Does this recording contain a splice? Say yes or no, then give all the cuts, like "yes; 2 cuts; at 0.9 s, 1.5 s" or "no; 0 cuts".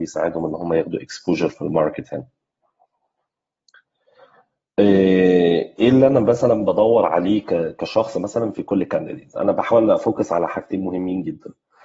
no; 0 cuts